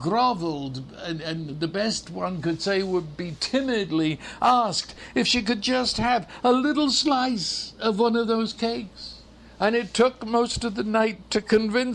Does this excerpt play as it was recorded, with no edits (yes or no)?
yes